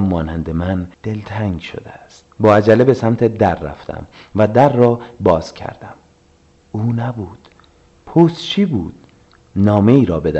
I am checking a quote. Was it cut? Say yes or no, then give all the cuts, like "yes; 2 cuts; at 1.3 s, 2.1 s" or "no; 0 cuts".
yes; 2 cuts; at 0.9 s, 2.3 s